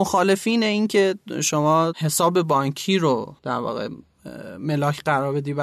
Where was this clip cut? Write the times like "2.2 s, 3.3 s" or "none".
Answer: 3.4 s